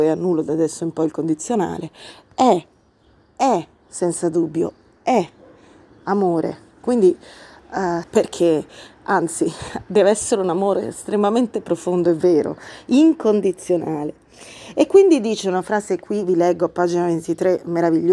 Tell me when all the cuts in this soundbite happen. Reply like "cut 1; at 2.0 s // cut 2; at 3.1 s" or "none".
cut 1; at 6.8 s // cut 2; at 8.0 s